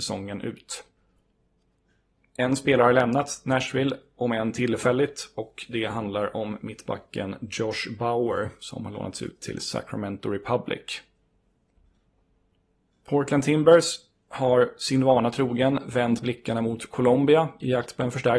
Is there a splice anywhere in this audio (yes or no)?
no